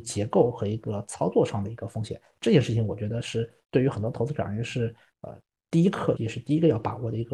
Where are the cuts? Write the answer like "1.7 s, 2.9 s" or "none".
6.2 s